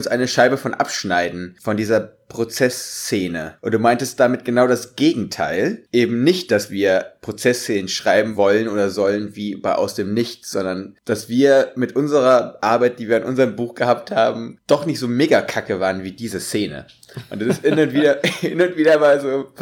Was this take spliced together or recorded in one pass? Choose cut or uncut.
uncut